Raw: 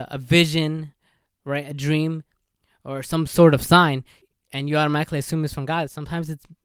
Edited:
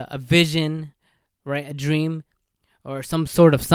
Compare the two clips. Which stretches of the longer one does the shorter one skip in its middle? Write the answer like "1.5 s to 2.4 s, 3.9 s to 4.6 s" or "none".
none